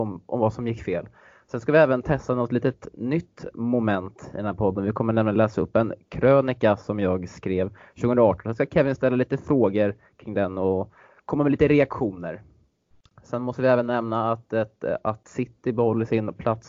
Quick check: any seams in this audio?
no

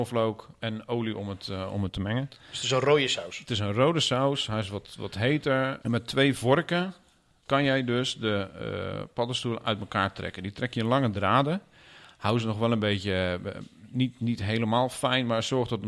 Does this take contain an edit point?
yes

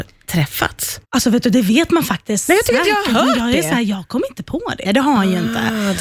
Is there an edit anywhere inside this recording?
yes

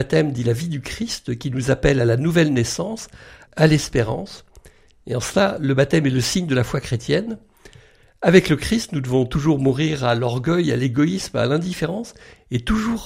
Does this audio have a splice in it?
yes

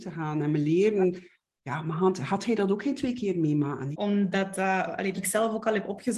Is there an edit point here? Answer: yes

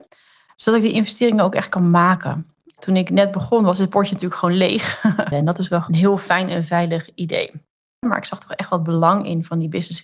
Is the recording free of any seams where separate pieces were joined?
no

